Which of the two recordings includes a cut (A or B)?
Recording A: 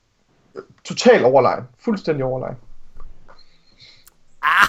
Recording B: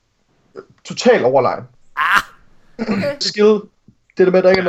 B